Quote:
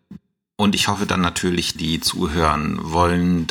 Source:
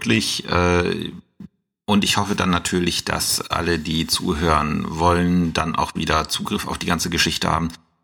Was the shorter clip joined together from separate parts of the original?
yes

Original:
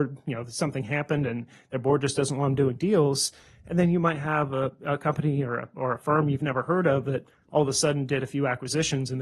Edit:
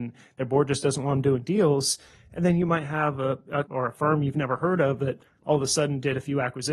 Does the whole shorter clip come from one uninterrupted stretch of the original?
no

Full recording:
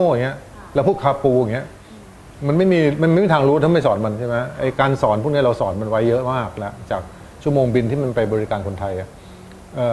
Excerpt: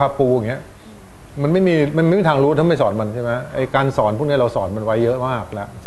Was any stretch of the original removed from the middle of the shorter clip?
no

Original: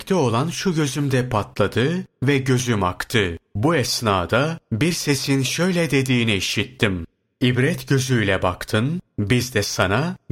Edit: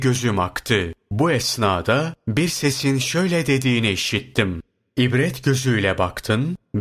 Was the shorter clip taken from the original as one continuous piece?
yes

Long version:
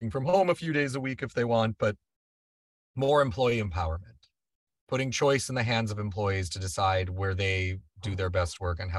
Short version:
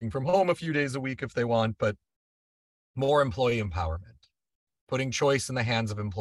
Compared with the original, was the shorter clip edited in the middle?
no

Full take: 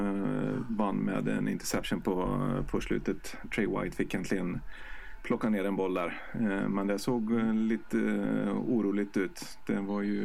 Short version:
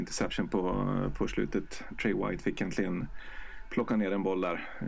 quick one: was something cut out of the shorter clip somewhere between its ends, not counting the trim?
no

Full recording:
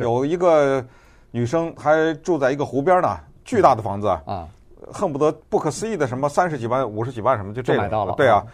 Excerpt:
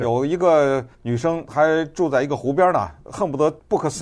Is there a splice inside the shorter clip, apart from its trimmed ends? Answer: yes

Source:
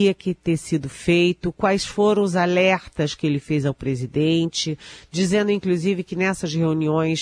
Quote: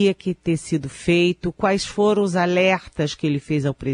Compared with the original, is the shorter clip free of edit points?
yes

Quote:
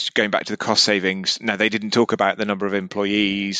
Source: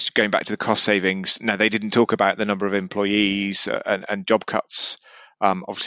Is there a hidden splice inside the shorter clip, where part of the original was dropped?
no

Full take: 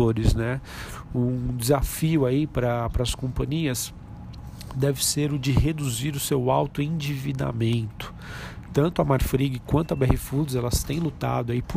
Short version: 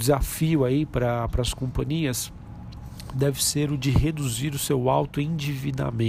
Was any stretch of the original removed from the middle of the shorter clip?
no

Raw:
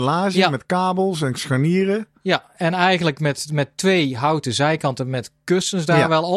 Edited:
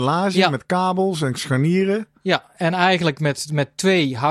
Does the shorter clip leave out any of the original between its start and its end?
no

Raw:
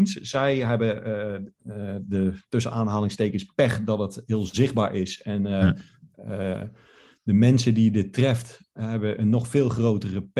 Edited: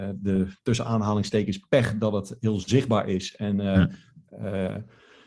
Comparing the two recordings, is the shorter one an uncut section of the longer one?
yes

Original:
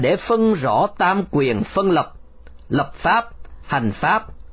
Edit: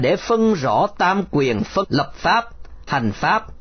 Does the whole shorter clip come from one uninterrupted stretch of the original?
no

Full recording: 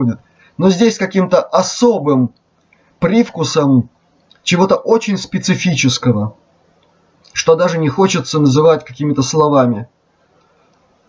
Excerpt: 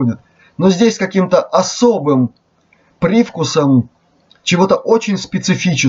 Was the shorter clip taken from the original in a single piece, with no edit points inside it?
yes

